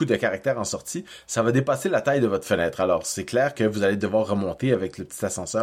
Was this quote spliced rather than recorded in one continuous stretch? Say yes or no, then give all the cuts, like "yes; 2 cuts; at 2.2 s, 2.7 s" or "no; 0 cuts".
no; 0 cuts